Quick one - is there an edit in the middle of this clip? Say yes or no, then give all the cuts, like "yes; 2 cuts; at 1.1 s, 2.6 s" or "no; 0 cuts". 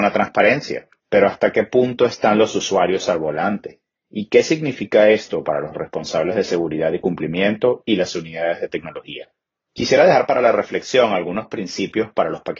yes; 1 cut; at 1.0 s